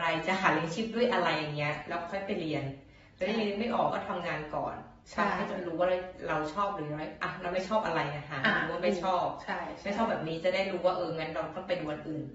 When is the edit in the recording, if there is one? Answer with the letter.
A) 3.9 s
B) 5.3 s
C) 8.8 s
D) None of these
A